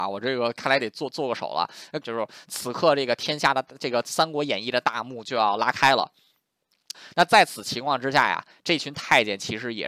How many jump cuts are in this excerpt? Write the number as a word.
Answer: two